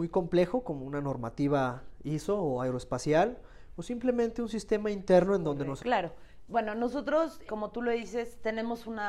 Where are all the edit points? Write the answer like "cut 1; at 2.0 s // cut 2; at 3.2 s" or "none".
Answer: cut 1; at 5.8 s // cut 2; at 7.5 s